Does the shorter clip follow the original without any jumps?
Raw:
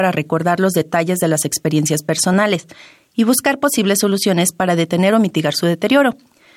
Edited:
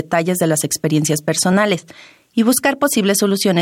yes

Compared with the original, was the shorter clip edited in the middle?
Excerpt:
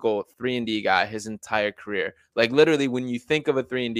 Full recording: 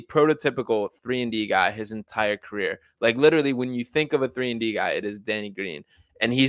no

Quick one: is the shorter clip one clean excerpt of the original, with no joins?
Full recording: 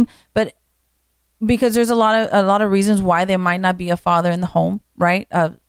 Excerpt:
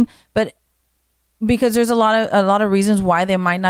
yes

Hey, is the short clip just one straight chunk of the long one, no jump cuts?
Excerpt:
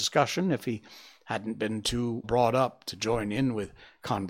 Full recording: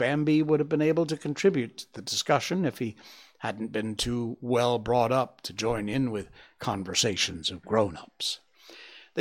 no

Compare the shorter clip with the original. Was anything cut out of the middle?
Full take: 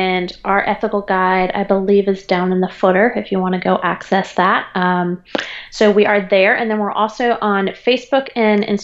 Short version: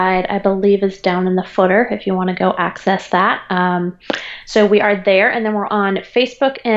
yes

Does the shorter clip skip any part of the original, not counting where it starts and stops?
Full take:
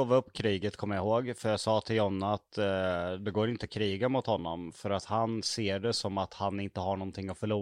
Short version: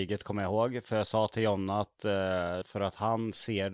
yes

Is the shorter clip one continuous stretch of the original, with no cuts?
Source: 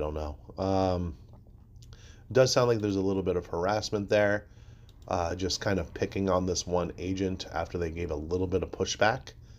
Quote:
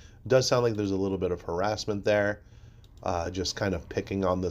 yes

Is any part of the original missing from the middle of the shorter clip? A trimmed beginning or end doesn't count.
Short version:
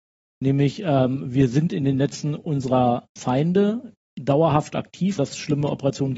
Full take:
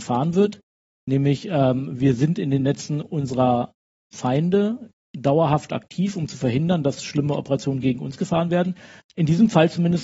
yes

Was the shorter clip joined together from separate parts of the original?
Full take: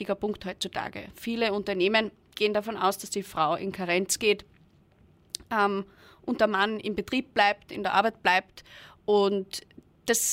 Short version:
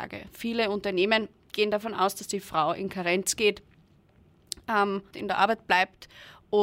yes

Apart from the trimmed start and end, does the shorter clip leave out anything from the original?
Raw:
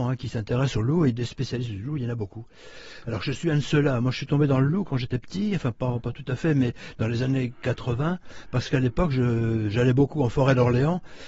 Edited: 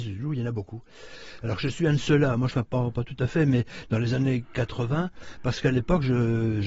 yes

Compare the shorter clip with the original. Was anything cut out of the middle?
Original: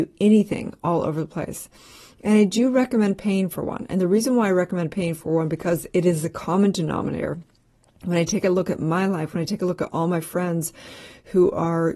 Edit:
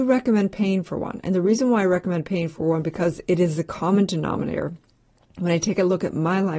no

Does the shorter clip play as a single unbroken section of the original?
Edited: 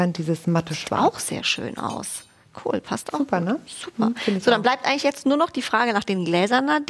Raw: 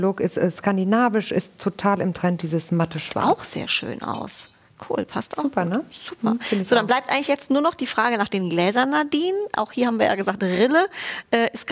yes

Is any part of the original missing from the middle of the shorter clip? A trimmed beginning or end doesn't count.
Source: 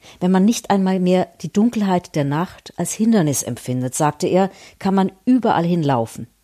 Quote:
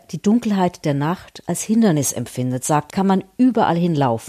yes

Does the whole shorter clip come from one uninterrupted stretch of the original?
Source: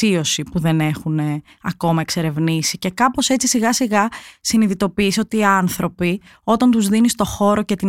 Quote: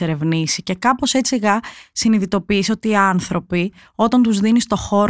no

